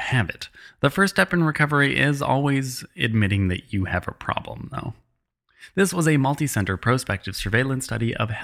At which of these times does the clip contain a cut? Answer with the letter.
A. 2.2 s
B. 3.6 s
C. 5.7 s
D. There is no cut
D